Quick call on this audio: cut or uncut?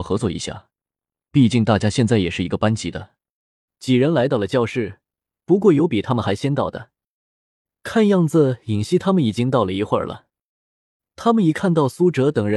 cut